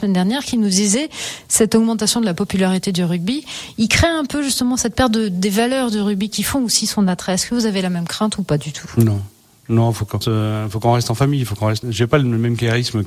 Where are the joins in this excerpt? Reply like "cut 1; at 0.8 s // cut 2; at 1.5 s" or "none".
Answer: cut 1; at 10.2 s // cut 2; at 11.8 s

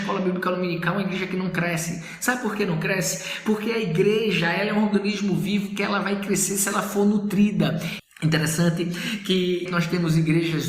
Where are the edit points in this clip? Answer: cut 1; at 8.0 s // cut 2; at 9.7 s

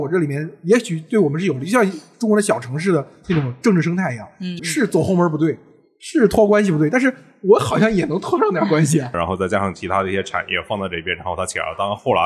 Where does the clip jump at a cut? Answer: cut 1; at 4.6 s // cut 2; at 9.1 s

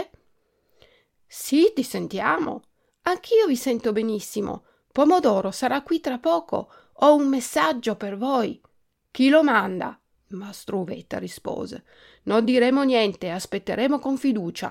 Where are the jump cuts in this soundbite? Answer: cut 1; at 10.1 s

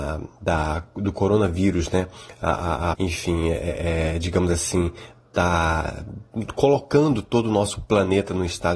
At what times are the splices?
cut 1; at 2.9 s

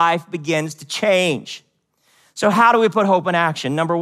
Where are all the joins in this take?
none

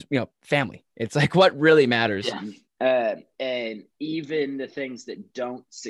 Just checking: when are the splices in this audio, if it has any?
cut 1; at 2.6 s

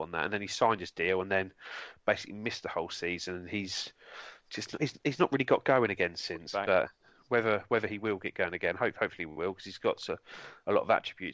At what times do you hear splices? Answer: none

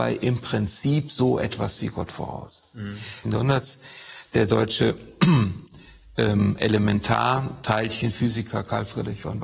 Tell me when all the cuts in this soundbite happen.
cut 1; at 3.2 s

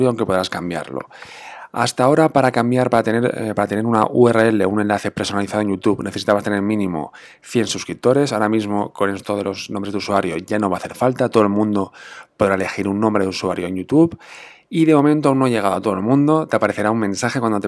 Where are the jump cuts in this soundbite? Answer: none

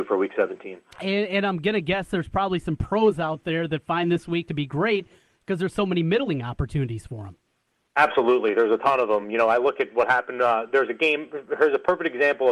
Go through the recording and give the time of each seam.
none

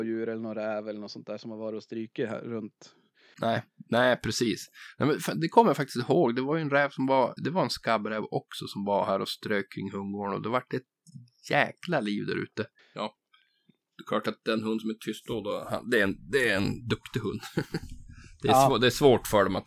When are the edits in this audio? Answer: cut 1; at 3.3 s // cut 2; at 7.4 s // cut 3; at 12.8 s

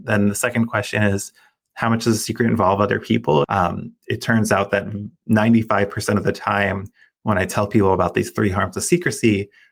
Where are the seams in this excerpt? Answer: cut 1; at 3.4 s

